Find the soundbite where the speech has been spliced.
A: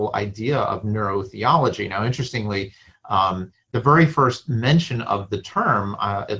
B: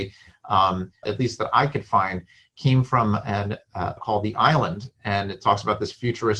B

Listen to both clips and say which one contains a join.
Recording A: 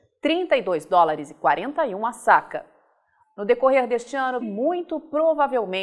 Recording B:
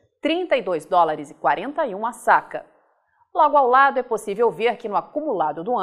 A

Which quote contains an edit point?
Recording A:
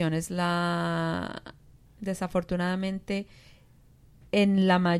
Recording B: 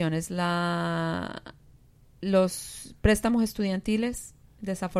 A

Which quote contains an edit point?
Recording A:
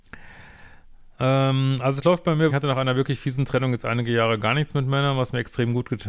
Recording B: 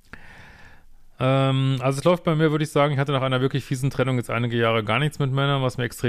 A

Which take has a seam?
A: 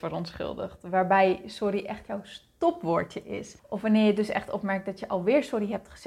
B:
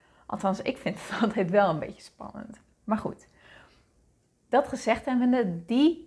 A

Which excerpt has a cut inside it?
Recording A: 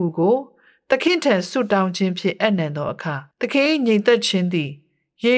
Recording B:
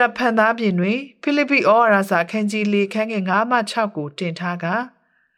A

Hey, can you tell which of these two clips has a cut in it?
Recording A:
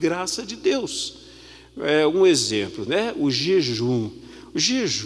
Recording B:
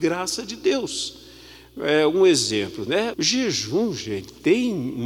B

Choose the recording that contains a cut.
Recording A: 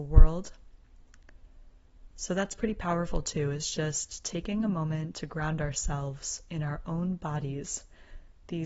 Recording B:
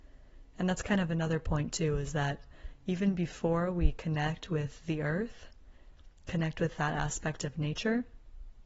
A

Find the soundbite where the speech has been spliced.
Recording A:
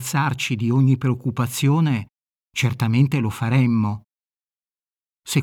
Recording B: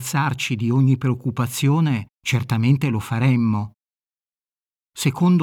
B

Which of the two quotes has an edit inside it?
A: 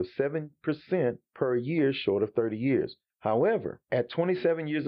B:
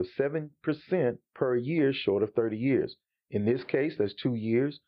A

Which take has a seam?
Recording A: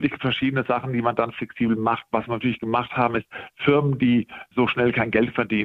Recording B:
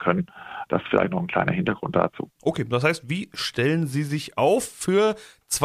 B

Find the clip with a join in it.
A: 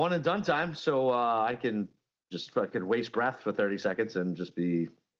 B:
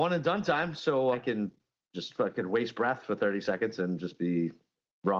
B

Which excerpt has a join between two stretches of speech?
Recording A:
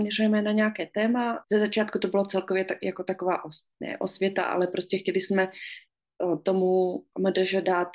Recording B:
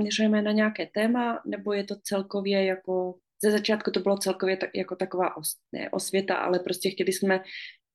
A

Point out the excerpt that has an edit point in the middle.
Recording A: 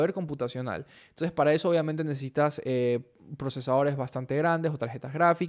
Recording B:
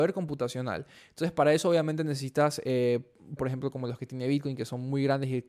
B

